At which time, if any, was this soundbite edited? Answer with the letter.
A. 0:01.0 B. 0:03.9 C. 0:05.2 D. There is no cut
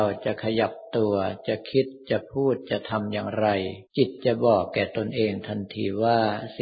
B